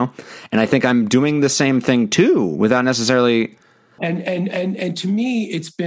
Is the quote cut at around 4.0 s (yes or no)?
yes